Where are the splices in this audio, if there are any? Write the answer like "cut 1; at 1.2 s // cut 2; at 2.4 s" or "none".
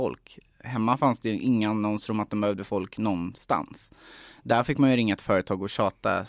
none